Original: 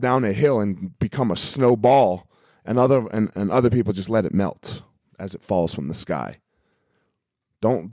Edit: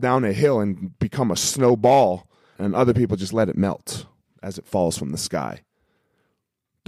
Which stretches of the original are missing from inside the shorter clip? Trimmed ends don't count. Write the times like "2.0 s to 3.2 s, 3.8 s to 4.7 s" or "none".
2.6 s to 3.3 s

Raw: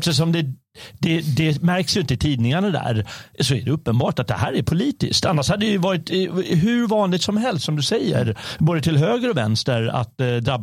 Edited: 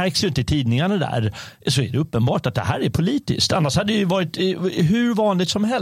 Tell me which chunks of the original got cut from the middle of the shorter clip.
none

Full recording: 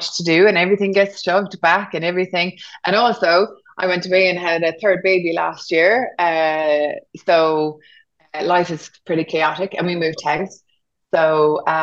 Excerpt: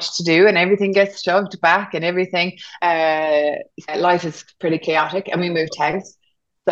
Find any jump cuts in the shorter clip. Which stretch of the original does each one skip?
2.8 s to 6.2 s, 7.2 s to 8.3 s

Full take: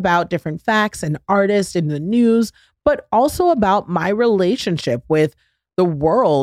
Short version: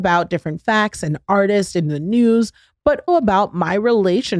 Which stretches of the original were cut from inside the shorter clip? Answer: 3.1 s to 3.4 s

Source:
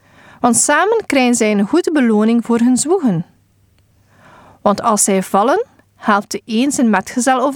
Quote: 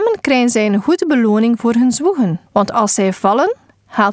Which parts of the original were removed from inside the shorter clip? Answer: 3.3 s to 4.6 s

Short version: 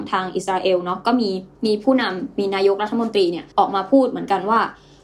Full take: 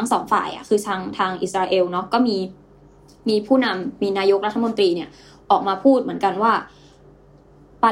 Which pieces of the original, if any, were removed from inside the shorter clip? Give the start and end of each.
2.6 s to 3.2 s, 5.1 s to 5.4 s

